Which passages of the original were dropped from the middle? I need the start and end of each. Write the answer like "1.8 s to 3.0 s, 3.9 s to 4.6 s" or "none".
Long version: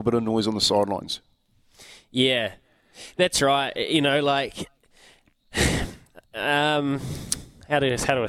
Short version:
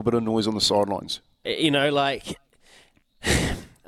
1.4 s to 3.7 s